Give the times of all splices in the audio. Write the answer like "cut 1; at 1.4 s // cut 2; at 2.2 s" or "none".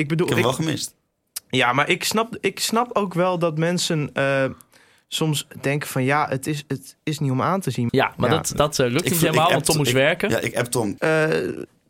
cut 1; at 7.9 s // cut 2; at 11.0 s